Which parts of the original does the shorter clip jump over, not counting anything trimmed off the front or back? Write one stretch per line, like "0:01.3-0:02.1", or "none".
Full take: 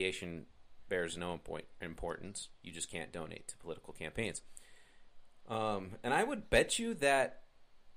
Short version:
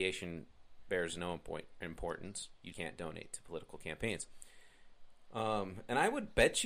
0:02.7-0:02.9